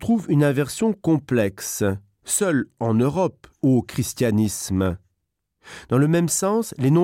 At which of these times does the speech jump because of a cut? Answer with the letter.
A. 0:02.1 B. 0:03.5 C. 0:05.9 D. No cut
B